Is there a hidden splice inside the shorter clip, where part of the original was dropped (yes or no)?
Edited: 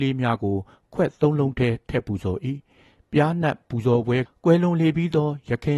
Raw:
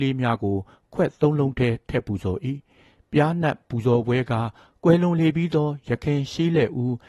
yes